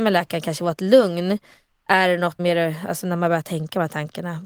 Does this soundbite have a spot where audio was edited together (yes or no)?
yes